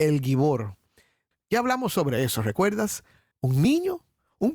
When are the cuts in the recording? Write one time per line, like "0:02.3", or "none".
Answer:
0:01.3
0:03.3